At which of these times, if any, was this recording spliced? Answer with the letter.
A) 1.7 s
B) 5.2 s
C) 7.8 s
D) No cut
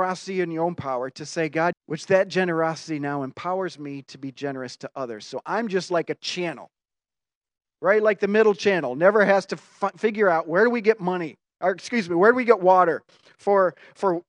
A